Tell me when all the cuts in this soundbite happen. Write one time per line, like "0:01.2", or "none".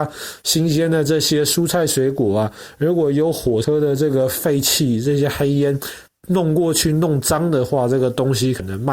none